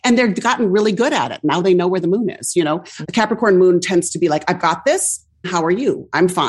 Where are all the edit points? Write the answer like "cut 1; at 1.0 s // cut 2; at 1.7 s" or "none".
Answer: cut 1; at 3.0 s // cut 2; at 5.4 s